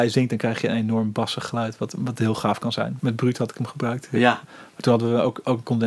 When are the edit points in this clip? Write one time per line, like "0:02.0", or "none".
0:03.0
0:04.4